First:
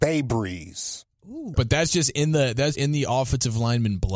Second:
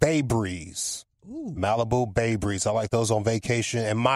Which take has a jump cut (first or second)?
first